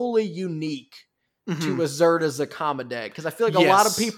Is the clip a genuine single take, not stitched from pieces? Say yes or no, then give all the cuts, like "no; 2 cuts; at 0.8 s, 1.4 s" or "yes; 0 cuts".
yes; 0 cuts